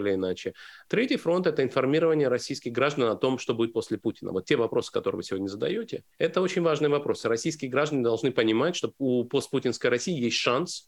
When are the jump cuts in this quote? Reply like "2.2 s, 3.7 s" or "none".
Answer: none

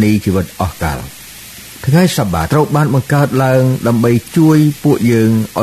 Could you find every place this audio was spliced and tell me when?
2.5 s

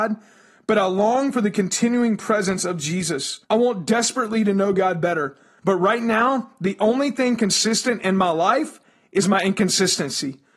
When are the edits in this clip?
3.4 s, 5.6 s

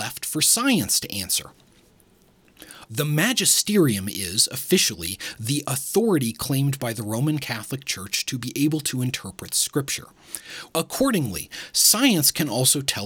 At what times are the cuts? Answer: 2.9 s, 10.7 s

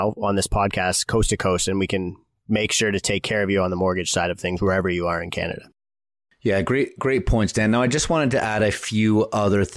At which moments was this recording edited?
none

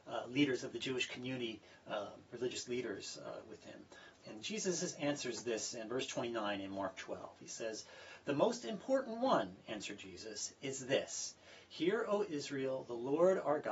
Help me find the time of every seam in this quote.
4.2 s

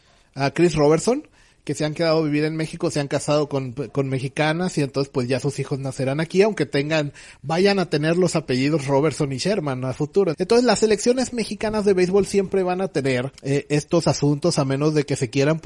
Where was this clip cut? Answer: 10.3 s, 13.4 s

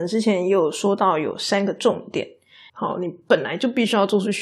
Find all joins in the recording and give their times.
2.7 s

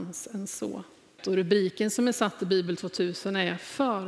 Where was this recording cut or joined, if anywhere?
1.2 s

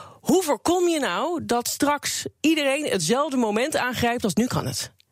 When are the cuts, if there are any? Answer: none

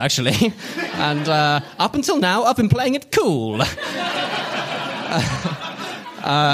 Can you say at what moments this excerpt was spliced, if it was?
3.1 s

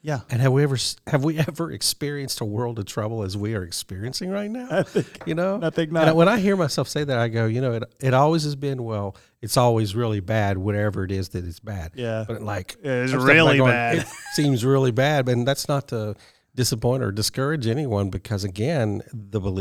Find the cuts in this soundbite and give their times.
none

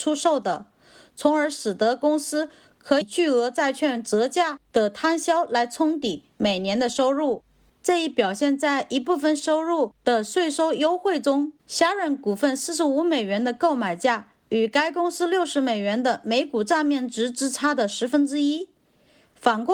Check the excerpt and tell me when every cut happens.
3.0 s, 7.7 s, 11.6 s

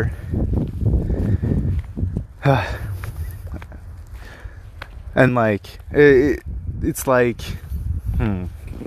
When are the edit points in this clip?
5.3 s

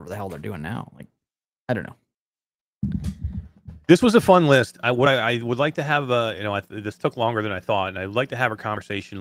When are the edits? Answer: none

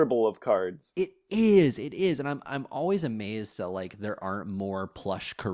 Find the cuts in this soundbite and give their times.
none

